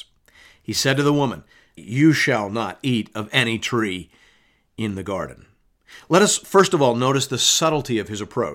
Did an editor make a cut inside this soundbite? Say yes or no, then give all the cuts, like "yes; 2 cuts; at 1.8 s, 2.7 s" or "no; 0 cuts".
yes; 1 cut; at 1.8 s